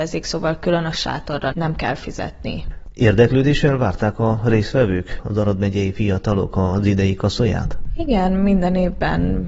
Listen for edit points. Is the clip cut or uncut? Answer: uncut